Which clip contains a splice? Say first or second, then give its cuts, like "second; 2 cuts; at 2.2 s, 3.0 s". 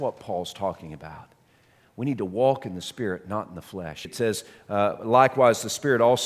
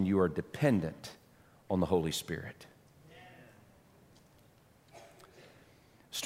first; 1 cut; at 4.0 s